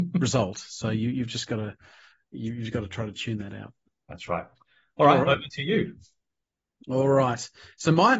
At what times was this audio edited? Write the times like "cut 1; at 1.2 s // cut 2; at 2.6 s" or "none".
none